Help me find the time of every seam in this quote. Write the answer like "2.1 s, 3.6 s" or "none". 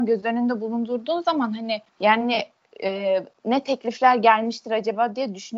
1.9 s